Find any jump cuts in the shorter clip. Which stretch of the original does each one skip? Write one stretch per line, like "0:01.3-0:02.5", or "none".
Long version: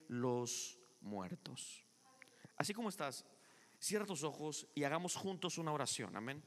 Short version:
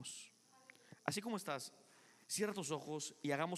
none